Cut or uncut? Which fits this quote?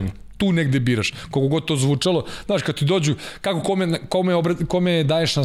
uncut